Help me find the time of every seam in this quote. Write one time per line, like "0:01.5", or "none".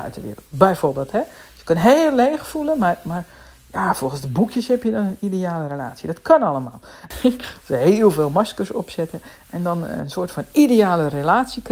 0:07.1